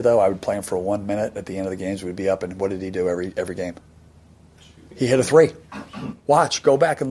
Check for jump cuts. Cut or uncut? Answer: uncut